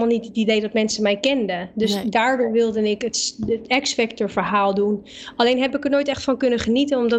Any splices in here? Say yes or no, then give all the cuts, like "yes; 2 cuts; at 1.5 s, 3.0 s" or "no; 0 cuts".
no; 0 cuts